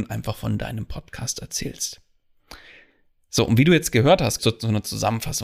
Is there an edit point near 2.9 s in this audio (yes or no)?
no